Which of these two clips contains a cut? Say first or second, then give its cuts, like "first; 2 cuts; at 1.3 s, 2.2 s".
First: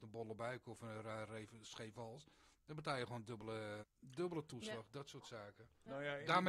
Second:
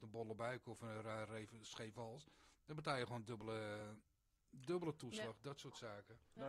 first; 1 cut; at 3.8 s